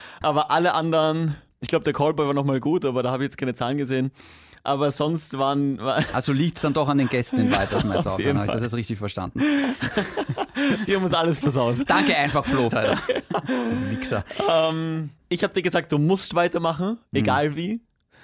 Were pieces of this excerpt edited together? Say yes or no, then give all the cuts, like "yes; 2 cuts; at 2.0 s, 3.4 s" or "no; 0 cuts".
yes; 1 cut; at 12.7 s